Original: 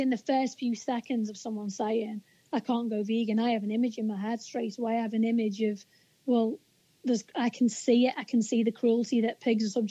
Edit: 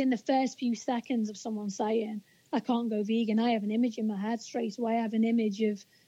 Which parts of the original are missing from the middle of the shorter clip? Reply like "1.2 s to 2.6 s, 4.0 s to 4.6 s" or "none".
none